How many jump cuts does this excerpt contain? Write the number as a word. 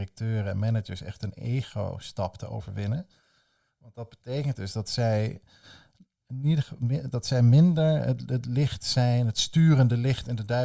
zero